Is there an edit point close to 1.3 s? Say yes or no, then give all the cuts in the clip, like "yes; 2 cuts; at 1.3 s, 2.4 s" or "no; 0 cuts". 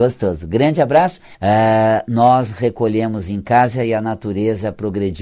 yes; 1 cut; at 1.3 s